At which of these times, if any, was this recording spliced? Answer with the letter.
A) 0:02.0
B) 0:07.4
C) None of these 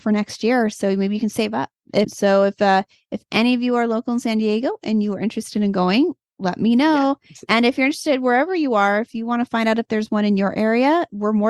A